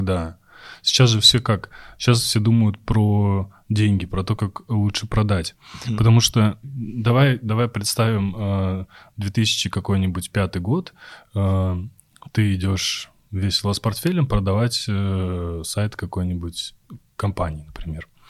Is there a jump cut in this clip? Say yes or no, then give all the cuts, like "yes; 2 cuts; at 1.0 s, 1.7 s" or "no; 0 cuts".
yes; 1 cut; at 6.6 s